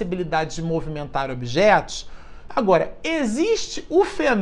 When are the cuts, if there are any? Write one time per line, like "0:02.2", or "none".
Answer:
0:02.5